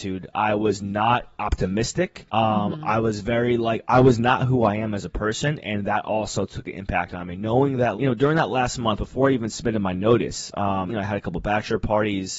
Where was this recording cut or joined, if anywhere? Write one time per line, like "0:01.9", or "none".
0:07.9
0:10.9